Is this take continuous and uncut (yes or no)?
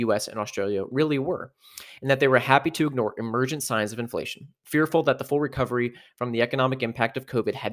yes